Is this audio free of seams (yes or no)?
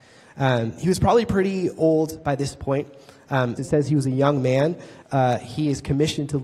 no